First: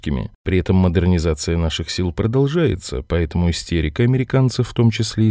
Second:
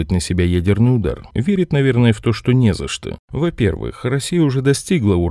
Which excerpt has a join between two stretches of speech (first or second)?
second